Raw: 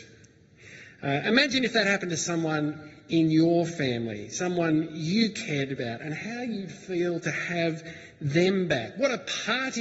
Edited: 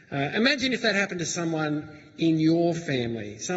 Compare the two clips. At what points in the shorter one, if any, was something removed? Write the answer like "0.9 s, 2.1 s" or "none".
none